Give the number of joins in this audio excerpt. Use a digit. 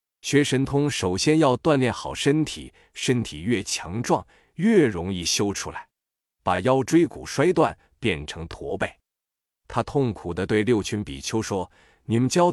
1